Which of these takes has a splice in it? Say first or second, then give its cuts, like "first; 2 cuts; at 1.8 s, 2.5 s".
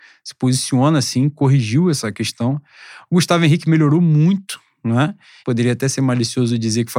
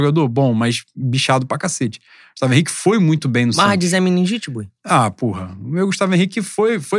first; 1 cut; at 5.4 s